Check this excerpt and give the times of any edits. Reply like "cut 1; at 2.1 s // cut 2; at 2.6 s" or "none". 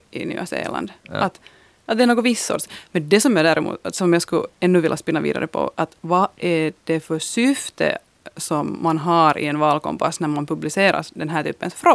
none